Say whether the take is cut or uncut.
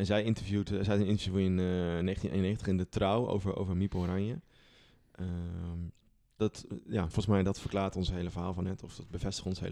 cut